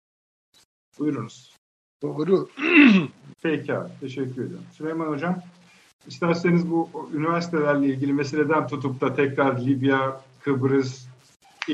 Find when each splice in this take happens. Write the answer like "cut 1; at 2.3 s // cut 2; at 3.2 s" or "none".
cut 1; at 3.3 s